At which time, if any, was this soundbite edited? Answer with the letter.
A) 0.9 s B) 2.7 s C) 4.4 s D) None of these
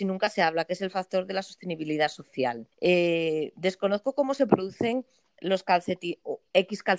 B